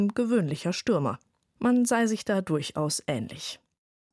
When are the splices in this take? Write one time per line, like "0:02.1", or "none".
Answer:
0:01.5